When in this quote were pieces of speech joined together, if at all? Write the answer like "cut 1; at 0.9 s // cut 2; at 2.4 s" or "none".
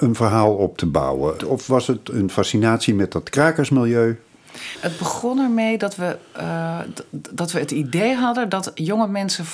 cut 1; at 1.4 s // cut 2; at 4.7 s